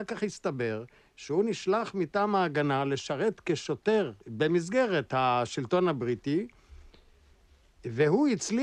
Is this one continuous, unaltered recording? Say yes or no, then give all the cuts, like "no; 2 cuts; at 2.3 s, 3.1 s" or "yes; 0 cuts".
no; 1 cut; at 4.2 s